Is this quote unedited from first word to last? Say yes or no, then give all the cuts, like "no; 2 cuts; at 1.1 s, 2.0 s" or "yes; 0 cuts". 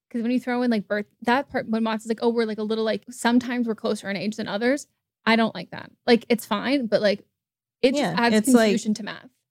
no; 1 cut; at 3.0 s